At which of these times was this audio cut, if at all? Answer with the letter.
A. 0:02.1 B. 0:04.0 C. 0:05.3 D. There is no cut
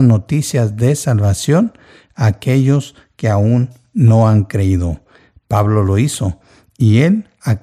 D